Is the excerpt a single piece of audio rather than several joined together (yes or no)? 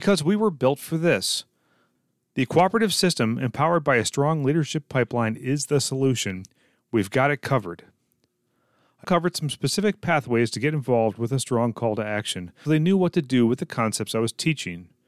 no